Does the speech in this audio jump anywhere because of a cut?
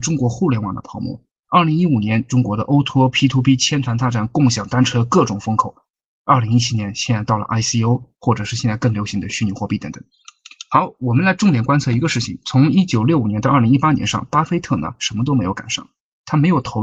no; 0 cuts

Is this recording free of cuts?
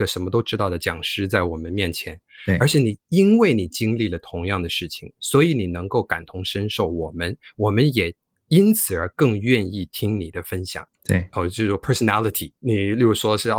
no; 2 cuts; at 10.9 s, 12.6 s

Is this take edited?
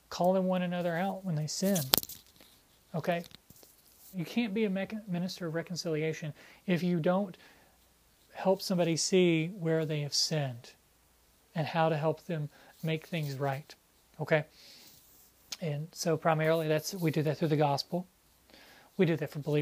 yes; 1 cut; at 4.1 s

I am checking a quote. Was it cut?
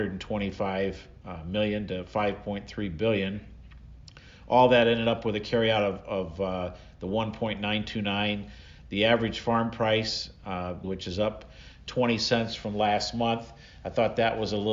yes; 1 cut; at 10.8 s

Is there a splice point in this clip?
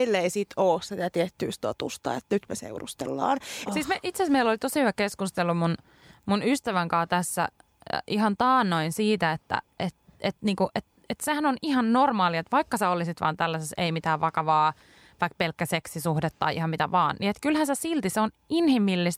yes; 1 cut; at 3.7 s

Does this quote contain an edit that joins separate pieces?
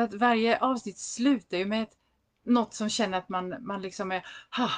no; 0 cuts

